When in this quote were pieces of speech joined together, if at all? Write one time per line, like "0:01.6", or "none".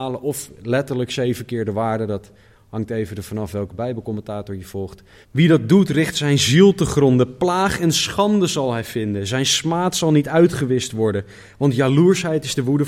0:05.2